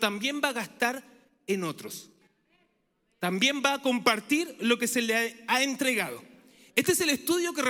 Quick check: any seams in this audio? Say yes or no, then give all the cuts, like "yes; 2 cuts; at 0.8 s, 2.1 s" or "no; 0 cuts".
no; 0 cuts